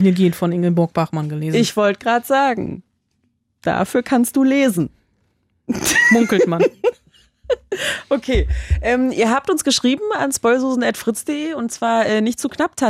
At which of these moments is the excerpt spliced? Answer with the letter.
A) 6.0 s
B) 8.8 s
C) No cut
C